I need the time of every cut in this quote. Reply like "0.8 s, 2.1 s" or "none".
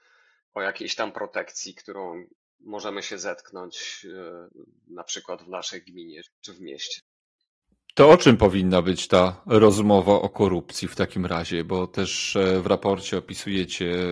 6.3 s